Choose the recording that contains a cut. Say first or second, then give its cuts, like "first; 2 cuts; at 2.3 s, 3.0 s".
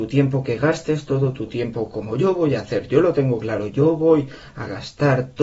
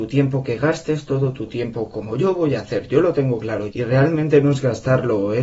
second; 1 cut; at 3.7 s